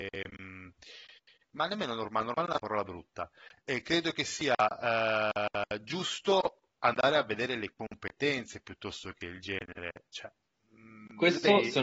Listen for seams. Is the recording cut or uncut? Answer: uncut